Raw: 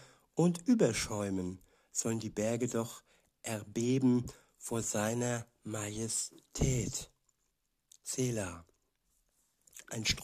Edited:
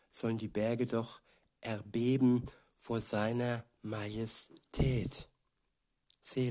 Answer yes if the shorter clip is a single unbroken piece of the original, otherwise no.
yes